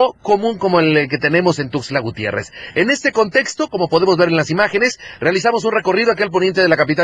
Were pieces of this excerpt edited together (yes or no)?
no